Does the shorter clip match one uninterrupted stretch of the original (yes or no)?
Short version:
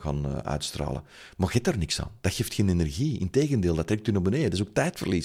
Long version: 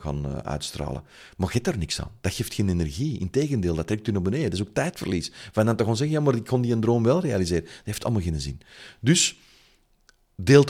yes